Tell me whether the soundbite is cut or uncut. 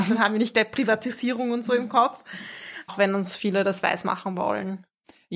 cut